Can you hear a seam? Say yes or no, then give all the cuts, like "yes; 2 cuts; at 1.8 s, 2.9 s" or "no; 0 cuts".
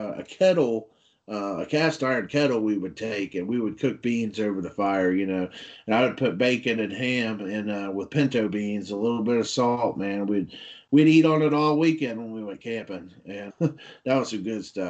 yes; 1 cut; at 13.5 s